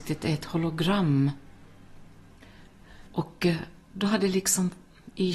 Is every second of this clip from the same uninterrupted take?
no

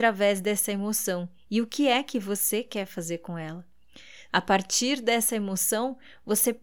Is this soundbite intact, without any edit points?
no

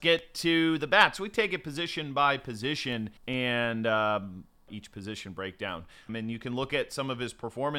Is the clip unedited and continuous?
no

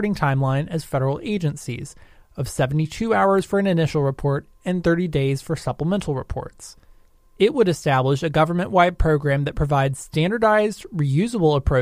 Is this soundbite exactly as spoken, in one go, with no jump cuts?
no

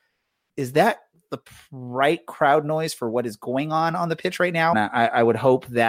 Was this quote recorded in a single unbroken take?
no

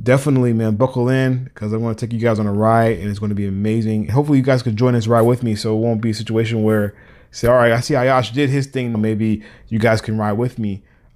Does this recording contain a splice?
yes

